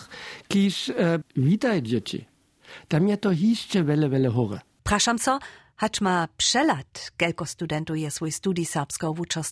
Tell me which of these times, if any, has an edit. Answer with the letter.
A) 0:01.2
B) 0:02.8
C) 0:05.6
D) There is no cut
A